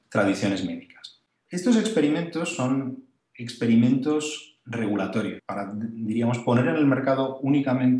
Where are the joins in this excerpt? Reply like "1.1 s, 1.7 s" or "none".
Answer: 1.4 s, 5.4 s